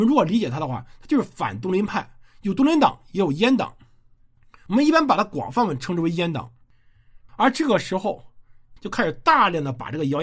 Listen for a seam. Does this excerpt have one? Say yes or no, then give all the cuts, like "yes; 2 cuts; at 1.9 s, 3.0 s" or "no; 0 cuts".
yes; 2 cuts; at 7.3 s, 8.8 s